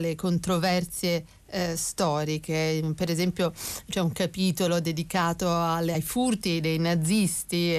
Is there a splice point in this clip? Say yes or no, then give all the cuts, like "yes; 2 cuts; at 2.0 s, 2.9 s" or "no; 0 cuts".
no; 0 cuts